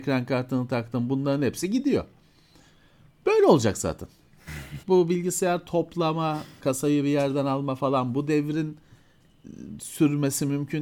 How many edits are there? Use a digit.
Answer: 2